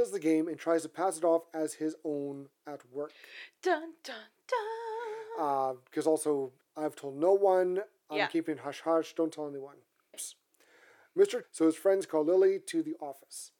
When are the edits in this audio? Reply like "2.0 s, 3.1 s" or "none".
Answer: 6.6 s, 10.1 s, 11.4 s